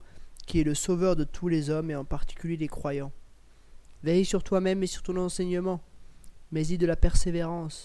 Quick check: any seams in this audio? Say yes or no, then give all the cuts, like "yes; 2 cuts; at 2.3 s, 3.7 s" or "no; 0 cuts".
yes; 1 cut; at 3.9 s